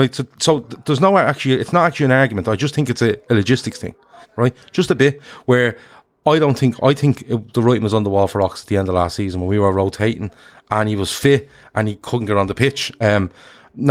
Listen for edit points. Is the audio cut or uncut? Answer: cut